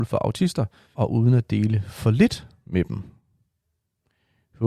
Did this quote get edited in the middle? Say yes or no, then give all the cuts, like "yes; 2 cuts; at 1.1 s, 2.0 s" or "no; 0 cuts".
yes; 1 cut; at 0.9 s